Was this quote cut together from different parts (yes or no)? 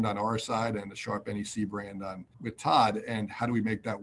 yes